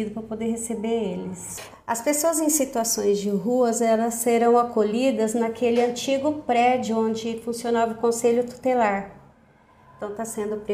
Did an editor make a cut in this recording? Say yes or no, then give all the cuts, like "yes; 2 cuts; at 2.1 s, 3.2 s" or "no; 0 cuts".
yes; 1 cut; at 1.7 s